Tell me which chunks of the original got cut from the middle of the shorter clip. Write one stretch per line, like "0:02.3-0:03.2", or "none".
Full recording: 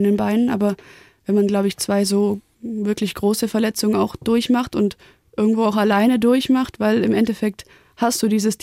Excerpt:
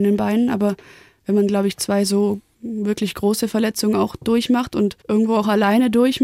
0:05.0-0:05.3